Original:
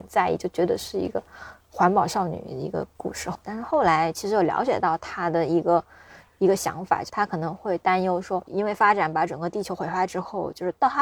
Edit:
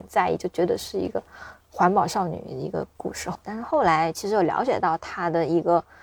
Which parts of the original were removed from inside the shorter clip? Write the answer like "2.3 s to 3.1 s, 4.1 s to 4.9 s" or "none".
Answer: none